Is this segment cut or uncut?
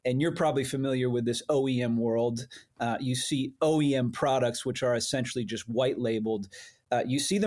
uncut